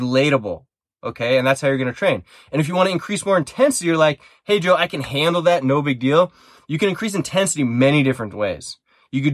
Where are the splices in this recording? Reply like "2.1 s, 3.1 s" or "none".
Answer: none